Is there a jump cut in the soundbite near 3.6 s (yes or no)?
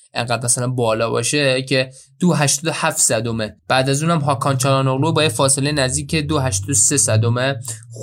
yes